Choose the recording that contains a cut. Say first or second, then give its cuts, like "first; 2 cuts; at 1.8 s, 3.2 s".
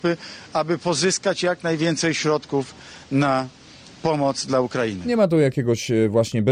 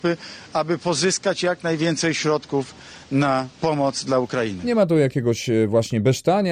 second; 1 cut; at 3.6 s